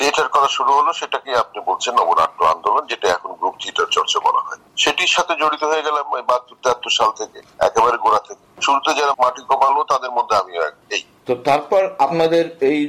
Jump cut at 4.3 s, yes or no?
no